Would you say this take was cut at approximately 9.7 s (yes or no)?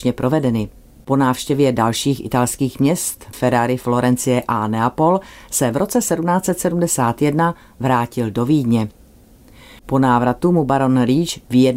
no